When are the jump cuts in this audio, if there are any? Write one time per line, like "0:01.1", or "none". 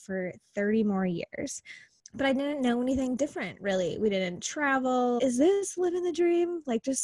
0:02.0
0:05.2